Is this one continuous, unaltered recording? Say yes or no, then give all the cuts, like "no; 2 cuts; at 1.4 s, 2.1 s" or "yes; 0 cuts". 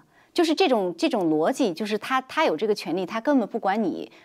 yes; 0 cuts